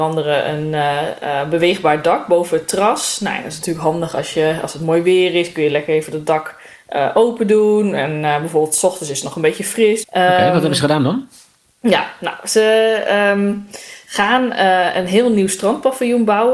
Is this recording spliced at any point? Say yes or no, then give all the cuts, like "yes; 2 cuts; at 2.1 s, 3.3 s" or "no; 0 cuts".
yes; 1 cut; at 10.0 s